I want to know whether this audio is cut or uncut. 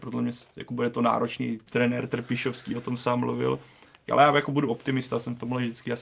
cut